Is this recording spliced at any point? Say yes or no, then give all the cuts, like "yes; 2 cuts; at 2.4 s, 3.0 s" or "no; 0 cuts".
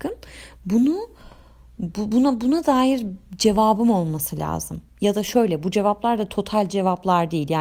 no; 0 cuts